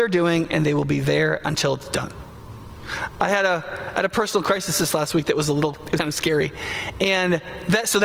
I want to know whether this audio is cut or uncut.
cut